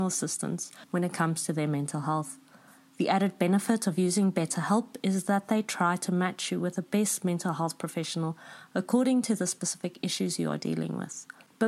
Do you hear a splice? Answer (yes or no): no